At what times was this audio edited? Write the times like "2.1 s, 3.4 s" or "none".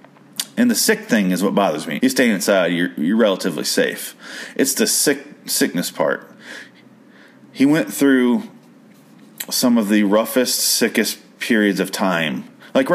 2.0 s